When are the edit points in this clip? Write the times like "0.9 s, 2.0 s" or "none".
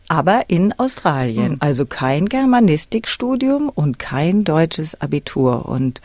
none